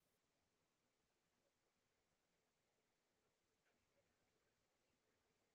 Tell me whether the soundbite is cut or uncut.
uncut